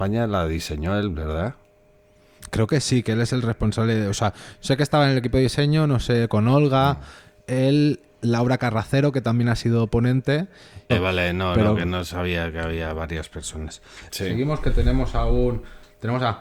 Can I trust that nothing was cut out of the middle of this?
no; 2 cuts; at 10.9 s, 14.1 s

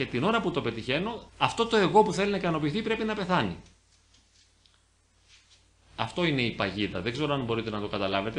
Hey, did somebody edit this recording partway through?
yes; 1 cut; at 1.3 s

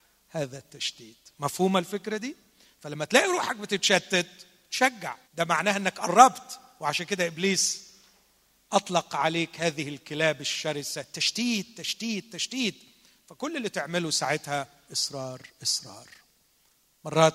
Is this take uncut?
no; 2 cuts; at 5.2 s, 14.9 s

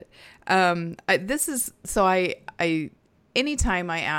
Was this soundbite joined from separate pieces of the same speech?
no; 0 cuts

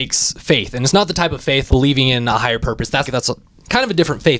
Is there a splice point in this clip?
yes; 2 cuts; at 1.7 s, 3.0 s

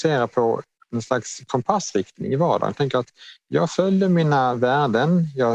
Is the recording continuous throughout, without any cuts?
yes; 0 cuts

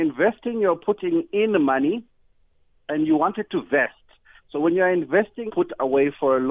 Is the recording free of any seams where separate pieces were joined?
no; 2 cuts; at 4.4 s, 5.5 s

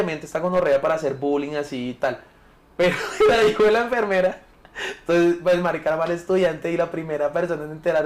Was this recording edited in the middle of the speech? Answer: no; 0 cuts

